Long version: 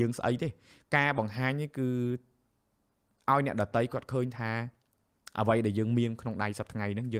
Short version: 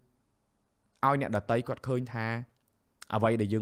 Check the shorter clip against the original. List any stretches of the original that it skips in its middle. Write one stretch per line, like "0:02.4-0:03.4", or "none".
none